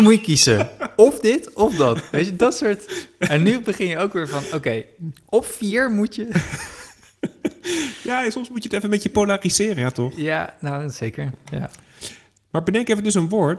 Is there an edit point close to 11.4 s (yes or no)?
no